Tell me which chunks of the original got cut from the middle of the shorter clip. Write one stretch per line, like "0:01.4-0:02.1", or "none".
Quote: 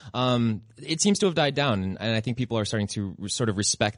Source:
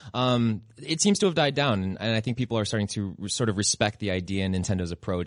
none